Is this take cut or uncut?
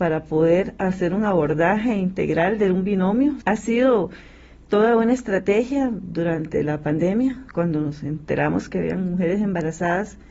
cut